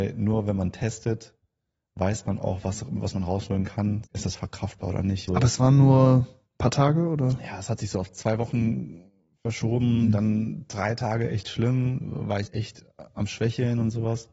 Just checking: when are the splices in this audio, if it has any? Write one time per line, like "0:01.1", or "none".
0:04.0
0:05.3
0:12.5